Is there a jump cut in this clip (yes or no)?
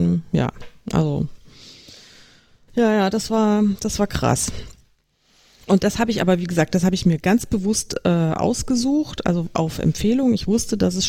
no